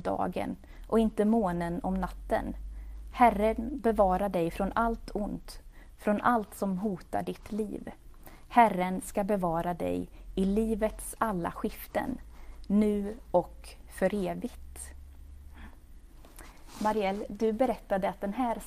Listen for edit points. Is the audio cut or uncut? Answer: uncut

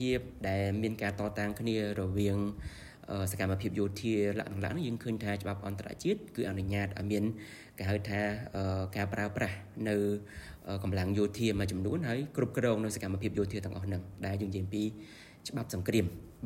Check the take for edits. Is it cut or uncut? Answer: uncut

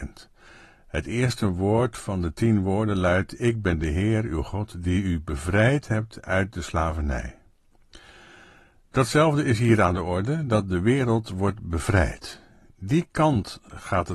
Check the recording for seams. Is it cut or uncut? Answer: uncut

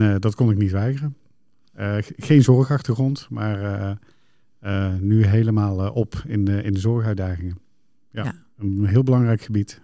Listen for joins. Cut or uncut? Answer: uncut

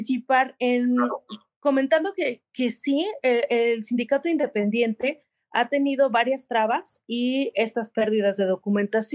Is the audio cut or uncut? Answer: uncut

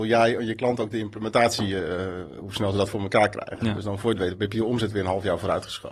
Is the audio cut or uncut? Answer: uncut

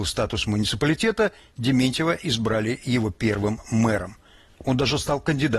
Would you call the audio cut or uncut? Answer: uncut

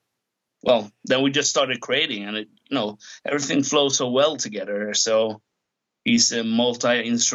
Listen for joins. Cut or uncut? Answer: uncut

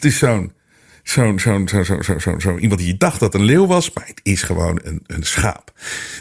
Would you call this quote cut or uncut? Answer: uncut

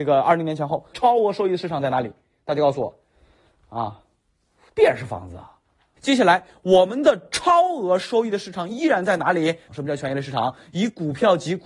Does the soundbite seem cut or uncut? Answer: cut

